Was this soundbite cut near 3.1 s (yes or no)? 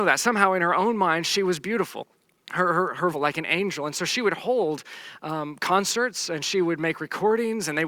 yes